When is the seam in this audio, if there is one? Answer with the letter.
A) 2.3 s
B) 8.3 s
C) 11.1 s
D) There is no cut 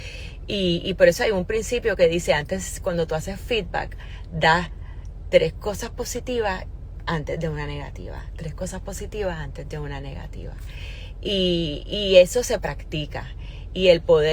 D